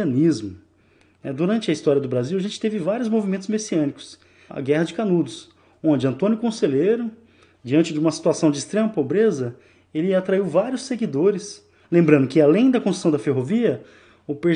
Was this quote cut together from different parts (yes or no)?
yes